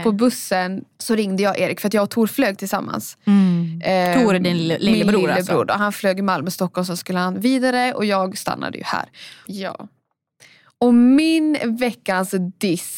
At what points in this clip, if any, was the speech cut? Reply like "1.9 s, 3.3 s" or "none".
9.4 s